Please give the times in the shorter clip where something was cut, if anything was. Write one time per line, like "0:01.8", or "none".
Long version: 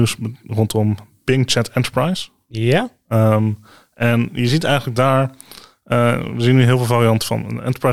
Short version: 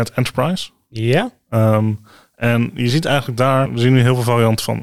0:03.7